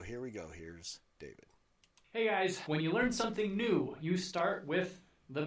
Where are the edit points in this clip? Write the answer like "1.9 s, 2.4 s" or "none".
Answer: 2.7 s